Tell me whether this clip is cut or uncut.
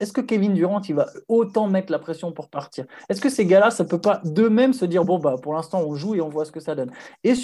uncut